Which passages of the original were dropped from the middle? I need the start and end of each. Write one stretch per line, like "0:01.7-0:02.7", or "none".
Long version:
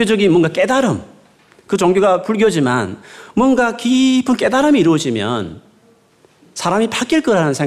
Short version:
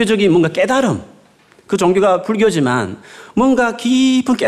none